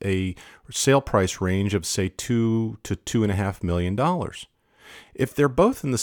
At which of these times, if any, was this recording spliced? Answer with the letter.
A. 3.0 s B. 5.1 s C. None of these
C